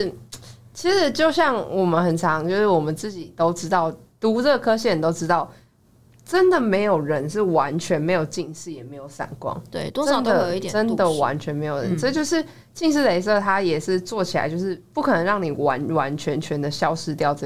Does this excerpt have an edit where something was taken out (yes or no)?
no